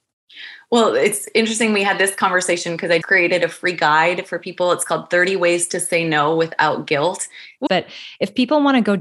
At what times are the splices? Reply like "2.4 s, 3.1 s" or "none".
3.0 s, 7.7 s